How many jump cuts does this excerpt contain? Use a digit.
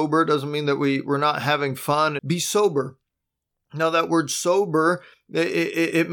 1